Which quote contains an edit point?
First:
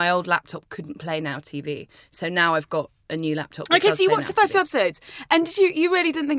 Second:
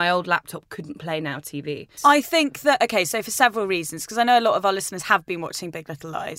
second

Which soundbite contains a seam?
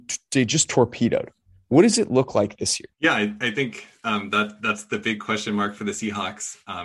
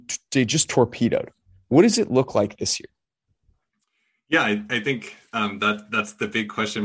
first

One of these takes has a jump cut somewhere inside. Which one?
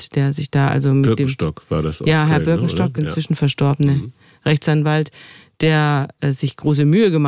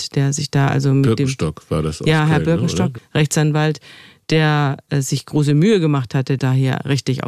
second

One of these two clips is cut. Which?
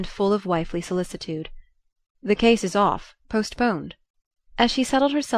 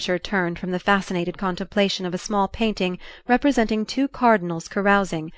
first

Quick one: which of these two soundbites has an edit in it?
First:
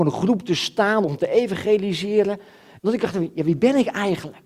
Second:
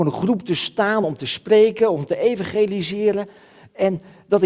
first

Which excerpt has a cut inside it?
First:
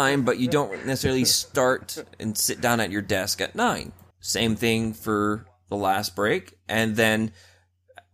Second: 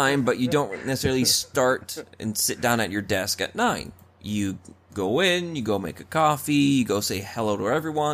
first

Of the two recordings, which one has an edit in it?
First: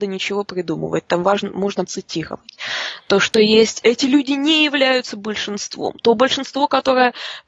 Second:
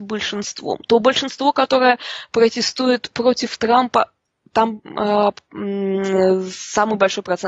first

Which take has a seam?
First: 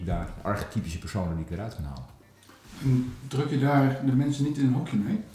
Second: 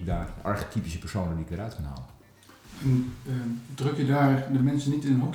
first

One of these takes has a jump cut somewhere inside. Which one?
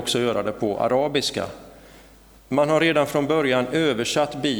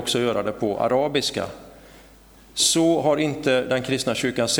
first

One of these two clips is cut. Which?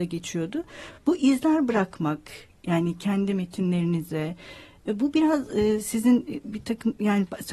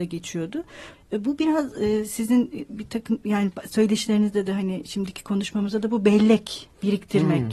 second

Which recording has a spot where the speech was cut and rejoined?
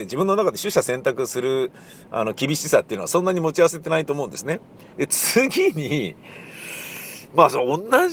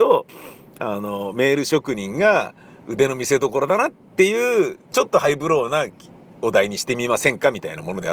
first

